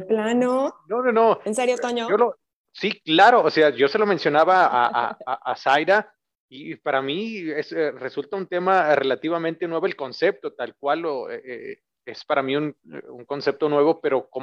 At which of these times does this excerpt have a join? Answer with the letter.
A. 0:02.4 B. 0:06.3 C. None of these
C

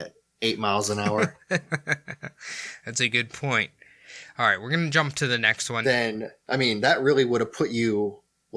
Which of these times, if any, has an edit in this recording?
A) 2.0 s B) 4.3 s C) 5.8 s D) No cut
C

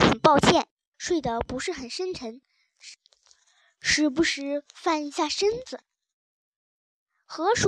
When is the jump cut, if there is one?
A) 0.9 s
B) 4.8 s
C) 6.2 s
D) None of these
A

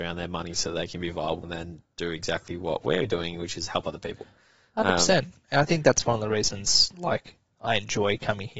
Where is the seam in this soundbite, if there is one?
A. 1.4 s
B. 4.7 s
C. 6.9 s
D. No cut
A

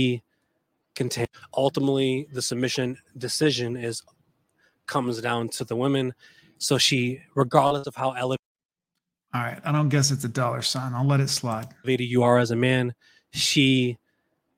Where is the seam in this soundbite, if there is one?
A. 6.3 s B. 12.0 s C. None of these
C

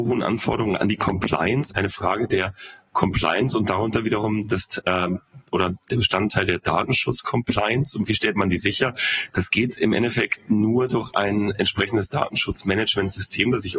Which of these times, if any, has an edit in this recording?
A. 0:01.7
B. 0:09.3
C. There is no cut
A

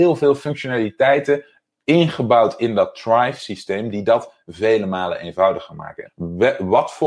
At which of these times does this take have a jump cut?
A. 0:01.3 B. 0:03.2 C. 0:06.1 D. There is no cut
C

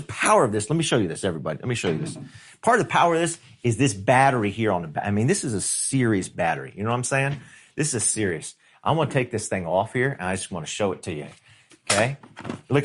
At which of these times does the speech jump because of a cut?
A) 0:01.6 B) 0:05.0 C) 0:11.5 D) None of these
D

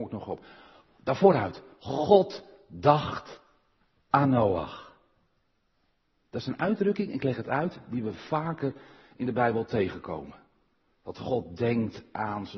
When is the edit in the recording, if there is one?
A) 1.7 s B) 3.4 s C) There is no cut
C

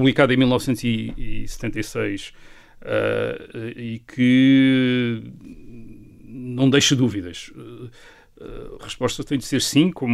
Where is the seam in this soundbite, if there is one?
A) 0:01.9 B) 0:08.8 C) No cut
B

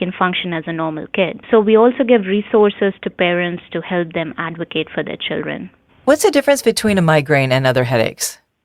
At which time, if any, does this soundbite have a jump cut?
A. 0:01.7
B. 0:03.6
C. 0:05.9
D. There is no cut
D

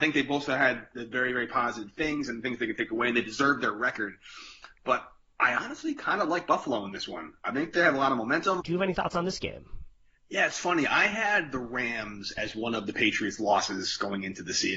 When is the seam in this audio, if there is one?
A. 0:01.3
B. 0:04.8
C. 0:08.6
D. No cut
C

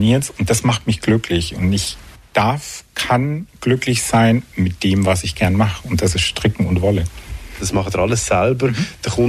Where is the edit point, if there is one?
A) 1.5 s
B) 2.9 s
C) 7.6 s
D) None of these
C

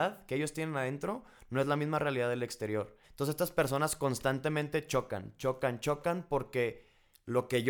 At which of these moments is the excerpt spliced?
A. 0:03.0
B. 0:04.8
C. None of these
A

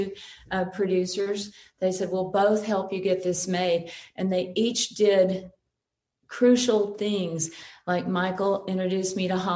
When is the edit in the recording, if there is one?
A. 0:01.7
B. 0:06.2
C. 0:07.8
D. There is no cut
D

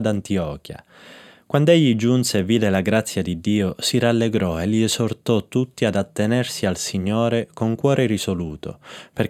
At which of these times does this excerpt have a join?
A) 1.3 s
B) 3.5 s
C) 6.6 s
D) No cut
D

